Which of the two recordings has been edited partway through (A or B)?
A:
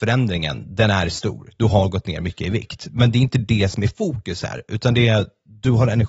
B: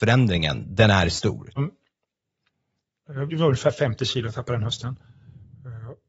B